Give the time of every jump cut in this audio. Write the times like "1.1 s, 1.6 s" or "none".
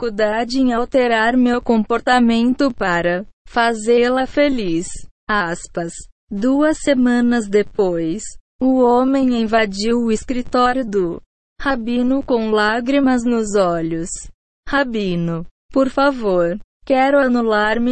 3.3 s